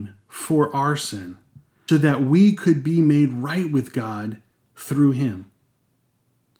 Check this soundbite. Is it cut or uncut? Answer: cut